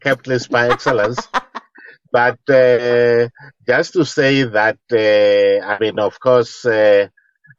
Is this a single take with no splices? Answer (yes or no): yes